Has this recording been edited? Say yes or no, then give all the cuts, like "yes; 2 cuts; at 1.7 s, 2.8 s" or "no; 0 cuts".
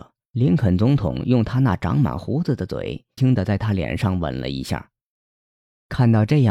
yes; 1 cut; at 3.2 s